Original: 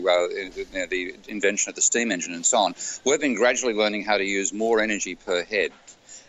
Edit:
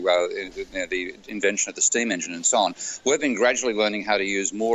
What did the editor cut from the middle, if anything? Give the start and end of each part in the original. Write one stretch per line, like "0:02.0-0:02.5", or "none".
none